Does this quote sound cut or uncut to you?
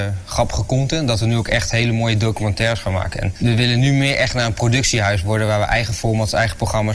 uncut